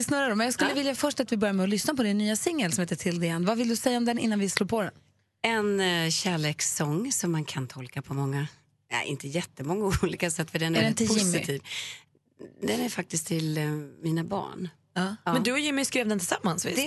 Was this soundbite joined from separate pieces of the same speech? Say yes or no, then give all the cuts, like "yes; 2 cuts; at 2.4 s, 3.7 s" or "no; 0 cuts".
no; 0 cuts